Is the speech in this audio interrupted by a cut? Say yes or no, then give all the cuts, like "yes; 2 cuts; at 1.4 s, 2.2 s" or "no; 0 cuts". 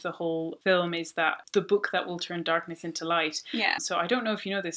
yes; 2 cuts; at 1.4 s, 3.8 s